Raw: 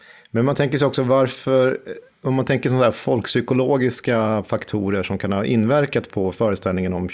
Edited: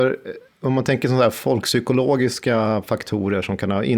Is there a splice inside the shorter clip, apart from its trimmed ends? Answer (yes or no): no